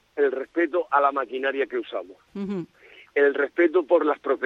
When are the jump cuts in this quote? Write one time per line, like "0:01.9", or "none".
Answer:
none